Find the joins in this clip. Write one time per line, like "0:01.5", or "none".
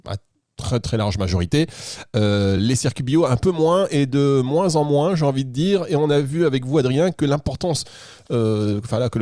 none